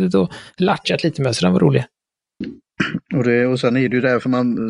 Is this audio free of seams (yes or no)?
yes